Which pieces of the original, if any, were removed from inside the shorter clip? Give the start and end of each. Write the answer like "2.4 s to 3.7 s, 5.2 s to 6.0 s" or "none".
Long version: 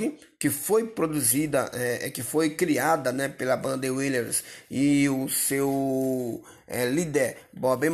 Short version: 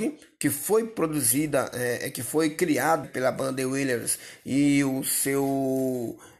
3.0 s to 3.3 s